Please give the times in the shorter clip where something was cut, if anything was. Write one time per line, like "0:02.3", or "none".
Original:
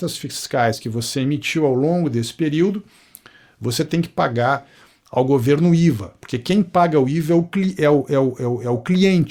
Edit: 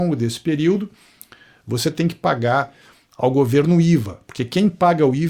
none